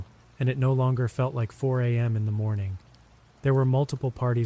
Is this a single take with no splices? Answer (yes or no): yes